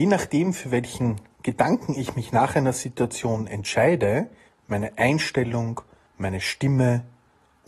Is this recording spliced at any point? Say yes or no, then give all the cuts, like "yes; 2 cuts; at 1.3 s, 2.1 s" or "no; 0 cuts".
yes; 2 cuts; at 4.5 s, 6.1 s